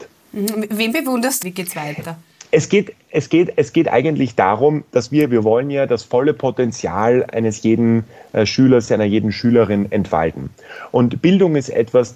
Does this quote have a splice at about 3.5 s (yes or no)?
no